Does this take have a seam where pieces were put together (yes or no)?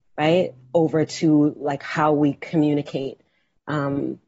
no